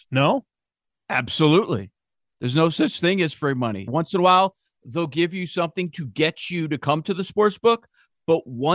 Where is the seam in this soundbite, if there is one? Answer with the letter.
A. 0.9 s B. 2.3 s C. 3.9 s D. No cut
C